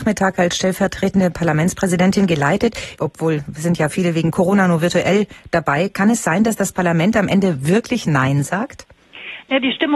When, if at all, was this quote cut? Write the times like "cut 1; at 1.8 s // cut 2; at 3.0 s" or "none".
cut 1; at 3.0 s